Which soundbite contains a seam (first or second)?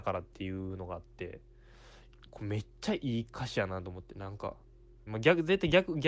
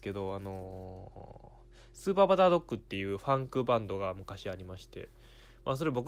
first